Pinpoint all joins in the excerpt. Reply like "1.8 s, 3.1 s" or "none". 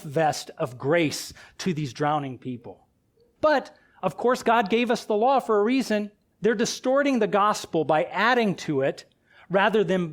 3.4 s, 6.3 s